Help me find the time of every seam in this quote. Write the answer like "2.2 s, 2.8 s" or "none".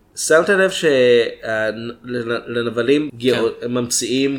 3.1 s